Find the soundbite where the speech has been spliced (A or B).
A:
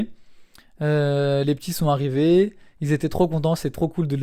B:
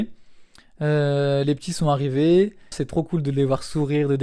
B